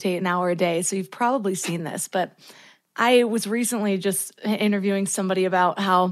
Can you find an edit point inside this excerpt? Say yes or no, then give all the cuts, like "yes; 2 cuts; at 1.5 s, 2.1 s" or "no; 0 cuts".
no; 0 cuts